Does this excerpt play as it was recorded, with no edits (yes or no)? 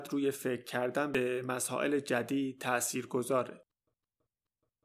yes